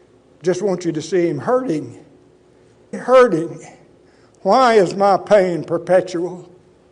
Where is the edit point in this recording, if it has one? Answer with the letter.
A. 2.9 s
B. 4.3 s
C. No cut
A